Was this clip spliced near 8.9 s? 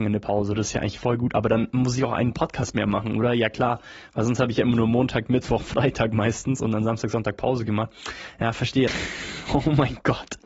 yes; 1 cut; at 8.9 s

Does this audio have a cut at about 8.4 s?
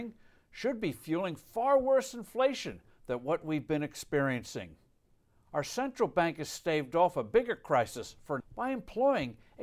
yes; 1 cut; at 8.4 s

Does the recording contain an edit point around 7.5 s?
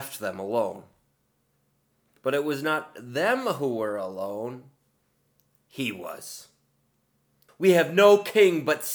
yes; 1 cut; at 7.5 s

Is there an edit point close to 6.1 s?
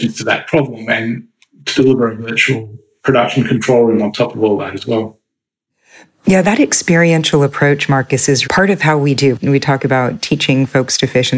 no; 1 cut; at 8.4 s

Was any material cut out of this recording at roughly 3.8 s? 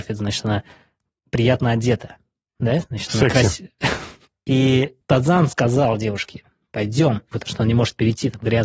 no; 2 cuts; at 5.0 s, 7.3 s

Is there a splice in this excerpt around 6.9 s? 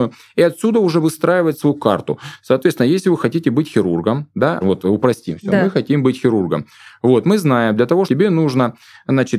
no; 2 cuts; at 4.6 s, 8.1 s

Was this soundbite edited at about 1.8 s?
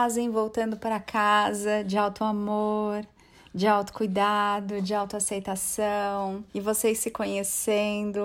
no; 1 cut; at 6.5 s

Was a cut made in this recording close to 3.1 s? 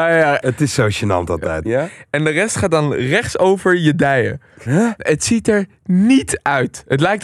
no; 2 cuts; at 1.6 s, 4.7 s

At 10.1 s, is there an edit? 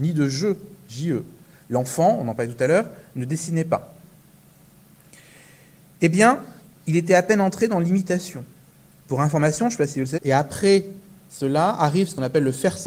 yes; 1 cut; at 10.1 s

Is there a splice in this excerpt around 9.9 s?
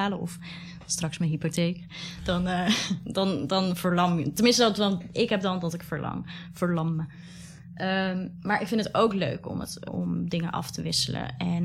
yes; 1 cut; at 9.9 s

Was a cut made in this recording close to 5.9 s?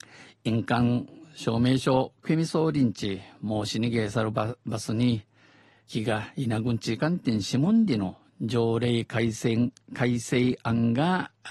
yes; 2 cuts; at 5.9 s, 7.0 s

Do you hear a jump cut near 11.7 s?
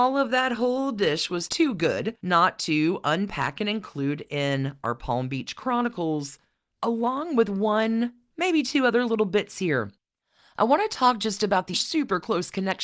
yes; 1 cut; at 11.7 s

